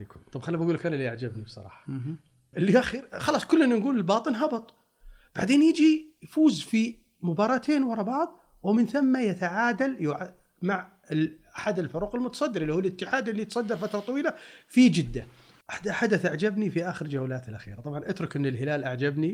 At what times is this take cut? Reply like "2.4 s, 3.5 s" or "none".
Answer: 2.5 s, 15.6 s